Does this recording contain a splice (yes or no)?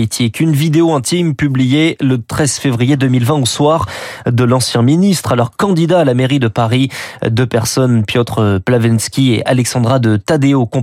no